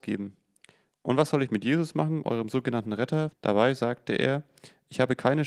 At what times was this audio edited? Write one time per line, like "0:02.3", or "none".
0:00.9
0:03.3